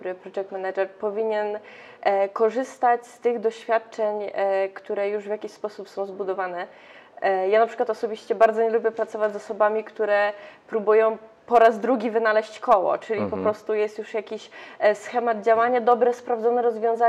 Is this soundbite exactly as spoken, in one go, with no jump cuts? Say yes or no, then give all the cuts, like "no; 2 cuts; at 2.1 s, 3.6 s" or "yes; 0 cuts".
yes; 0 cuts